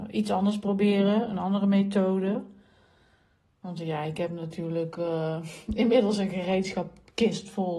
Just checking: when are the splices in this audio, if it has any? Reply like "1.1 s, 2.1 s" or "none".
none

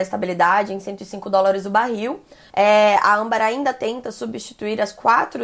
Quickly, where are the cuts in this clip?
2.5 s

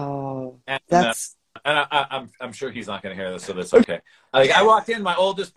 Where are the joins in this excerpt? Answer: none

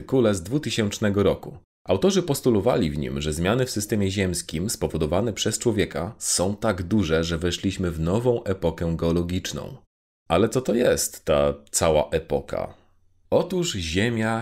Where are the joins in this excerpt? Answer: none

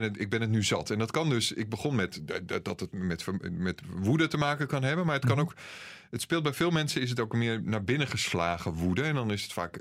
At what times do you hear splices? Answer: none

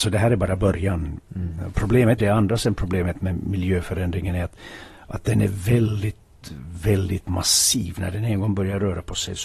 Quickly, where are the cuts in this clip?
2.2 s

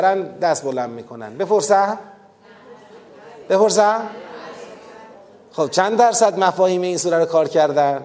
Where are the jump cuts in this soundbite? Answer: none

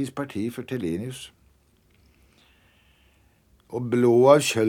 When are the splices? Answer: 3.5 s

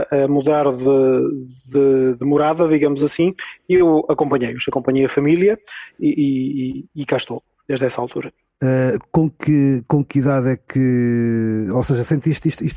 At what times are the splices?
none

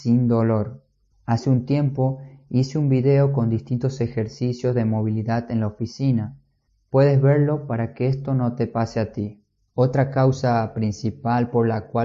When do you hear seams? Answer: none

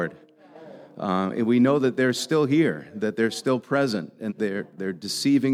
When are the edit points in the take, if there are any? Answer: 4.3 s

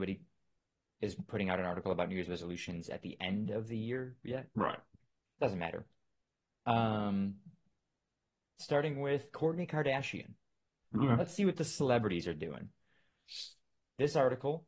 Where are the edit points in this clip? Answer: 10.8 s

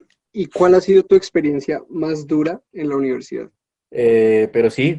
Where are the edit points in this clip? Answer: 3.8 s

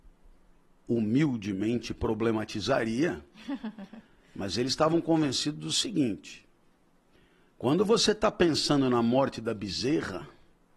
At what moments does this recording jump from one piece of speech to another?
none

